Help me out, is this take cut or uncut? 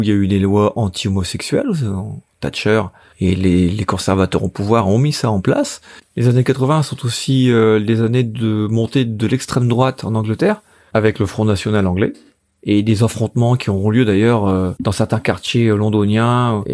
uncut